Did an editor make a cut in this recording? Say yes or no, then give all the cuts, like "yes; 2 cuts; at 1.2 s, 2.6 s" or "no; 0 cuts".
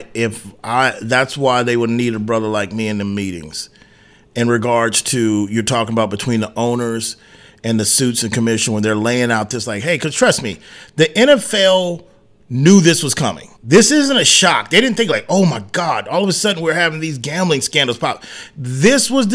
yes; 1 cut; at 13.6 s